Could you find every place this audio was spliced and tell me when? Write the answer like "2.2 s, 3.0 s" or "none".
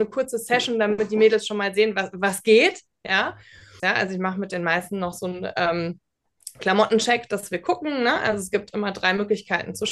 3.8 s